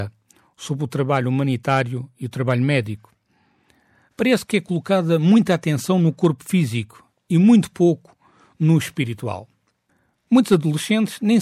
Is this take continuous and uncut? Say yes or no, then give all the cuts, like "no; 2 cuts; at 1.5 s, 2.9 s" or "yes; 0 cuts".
no; 1 cut; at 4.1 s